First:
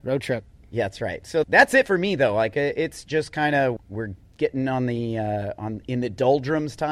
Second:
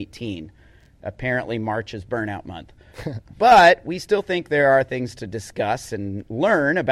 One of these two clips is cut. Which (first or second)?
first